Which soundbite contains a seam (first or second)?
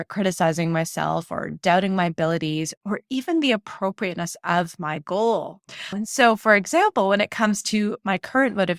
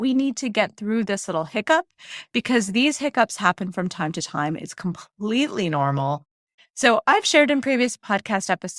second